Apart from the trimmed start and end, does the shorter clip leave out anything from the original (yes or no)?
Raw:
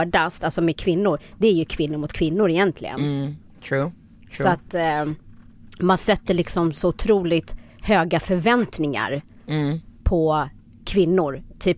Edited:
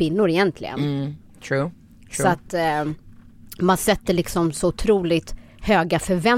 no